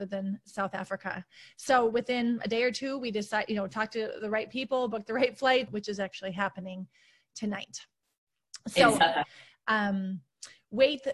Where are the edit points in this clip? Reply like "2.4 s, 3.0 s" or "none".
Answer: 5.7 s, 9.5 s